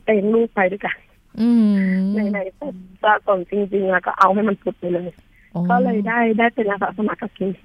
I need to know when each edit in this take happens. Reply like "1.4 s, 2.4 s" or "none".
3.5 s

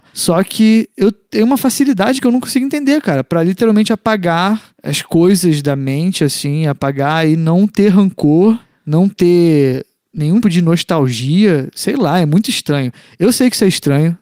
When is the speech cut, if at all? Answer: 10.4 s

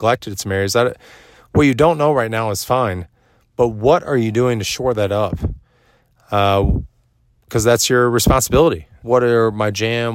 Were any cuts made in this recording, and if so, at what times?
9.0 s

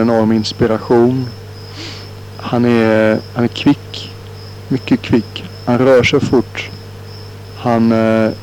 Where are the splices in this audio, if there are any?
none

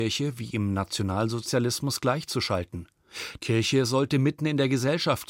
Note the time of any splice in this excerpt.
3.4 s

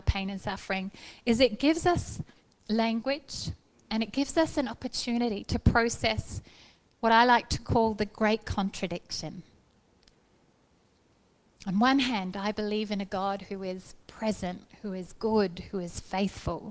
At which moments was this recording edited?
none

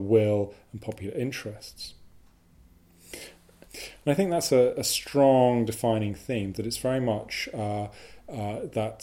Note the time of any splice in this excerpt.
3.7 s

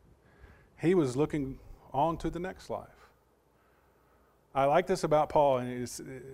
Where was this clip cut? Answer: none

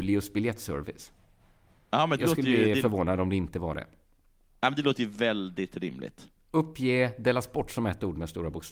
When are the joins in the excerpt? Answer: none

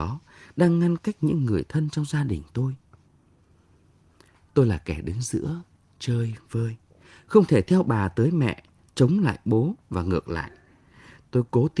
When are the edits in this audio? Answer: none

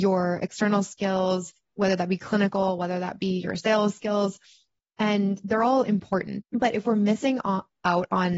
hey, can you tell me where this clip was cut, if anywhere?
6.4 s

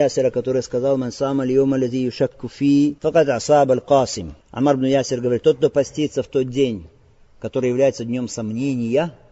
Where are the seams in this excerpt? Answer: 3.0 s, 4.4 s

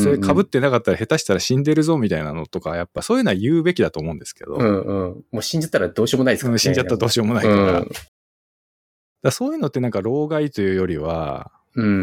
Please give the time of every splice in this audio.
none

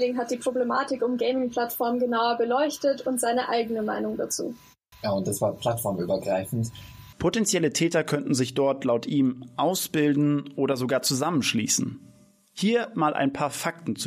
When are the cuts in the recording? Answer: 4.9 s, 7.1 s

